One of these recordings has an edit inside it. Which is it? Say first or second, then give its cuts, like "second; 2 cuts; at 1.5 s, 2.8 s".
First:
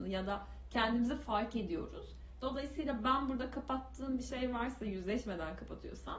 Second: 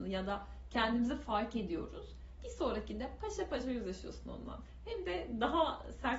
second; 1 cut; at 2.4 s